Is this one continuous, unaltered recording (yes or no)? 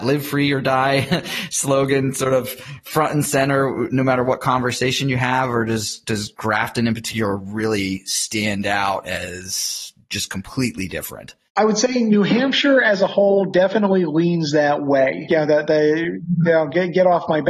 no